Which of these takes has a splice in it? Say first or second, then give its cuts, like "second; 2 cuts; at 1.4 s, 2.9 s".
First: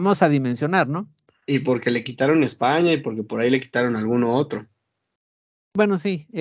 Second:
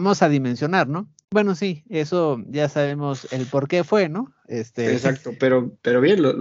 second; 2 cuts; at 1.2 s, 5.4 s